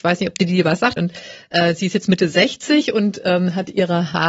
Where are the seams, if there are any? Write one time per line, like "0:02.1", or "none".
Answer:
0:01.0